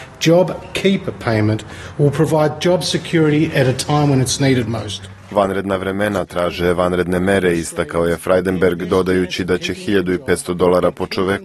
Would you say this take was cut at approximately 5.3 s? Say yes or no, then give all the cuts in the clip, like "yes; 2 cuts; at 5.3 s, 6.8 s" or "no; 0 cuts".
no; 0 cuts